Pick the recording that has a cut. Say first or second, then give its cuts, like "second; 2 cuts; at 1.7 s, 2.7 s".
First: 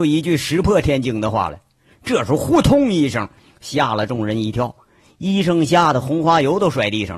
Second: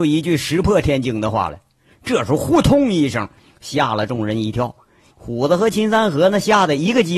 second; 1 cut; at 5.1 s